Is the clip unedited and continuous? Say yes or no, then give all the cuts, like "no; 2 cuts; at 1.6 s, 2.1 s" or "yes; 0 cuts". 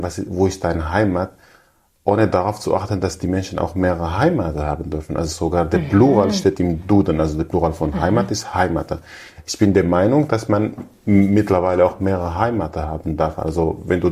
yes; 0 cuts